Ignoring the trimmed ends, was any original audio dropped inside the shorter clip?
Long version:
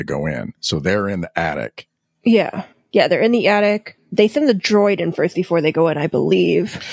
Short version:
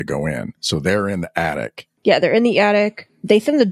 yes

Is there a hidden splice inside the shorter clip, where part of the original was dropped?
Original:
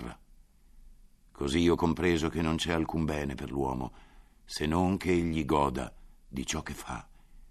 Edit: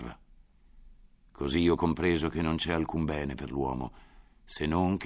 no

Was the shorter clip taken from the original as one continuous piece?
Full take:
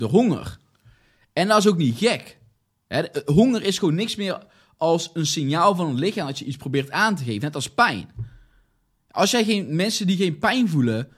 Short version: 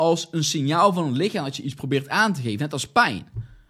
yes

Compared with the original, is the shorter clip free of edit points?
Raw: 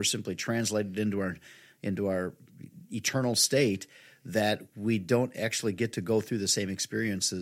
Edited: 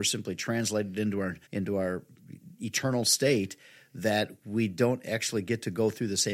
no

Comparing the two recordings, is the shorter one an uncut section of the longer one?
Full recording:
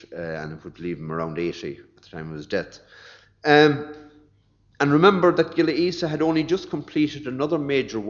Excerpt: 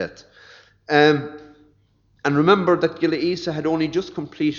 yes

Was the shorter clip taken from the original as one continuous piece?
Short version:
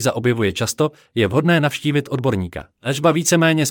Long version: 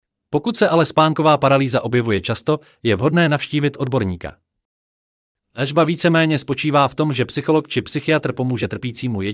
no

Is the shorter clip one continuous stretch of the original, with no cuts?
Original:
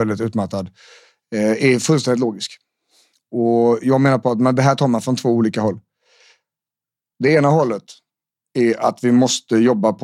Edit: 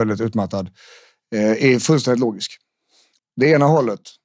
no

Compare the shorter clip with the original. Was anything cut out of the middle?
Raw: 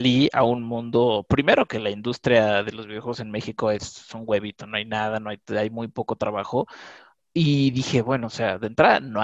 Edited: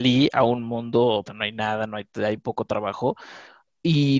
yes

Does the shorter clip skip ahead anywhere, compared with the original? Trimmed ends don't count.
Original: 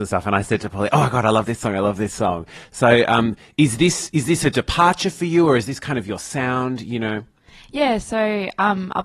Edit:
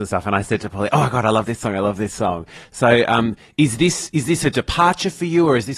no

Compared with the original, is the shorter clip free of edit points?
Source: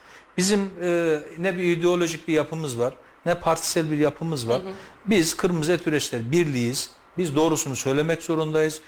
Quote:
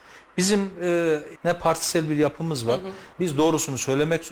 no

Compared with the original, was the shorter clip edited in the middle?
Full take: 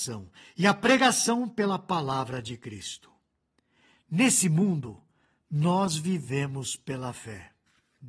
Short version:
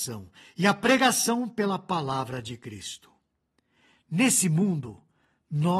no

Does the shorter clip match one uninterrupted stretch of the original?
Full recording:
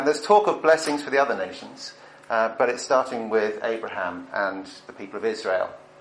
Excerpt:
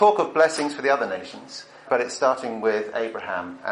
no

